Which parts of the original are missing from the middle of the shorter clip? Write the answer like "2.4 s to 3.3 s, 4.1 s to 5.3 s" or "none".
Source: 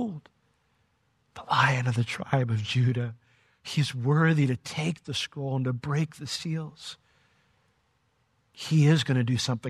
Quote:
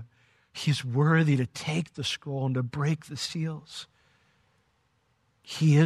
none